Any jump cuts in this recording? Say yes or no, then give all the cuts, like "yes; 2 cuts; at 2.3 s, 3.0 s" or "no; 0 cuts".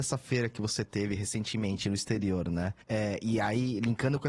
yes; 1 cut; at 2.8 s